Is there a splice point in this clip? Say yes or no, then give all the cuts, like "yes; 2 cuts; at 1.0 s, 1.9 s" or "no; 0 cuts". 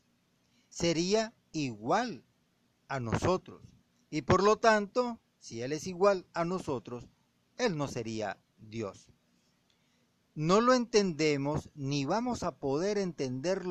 no; 0 cuts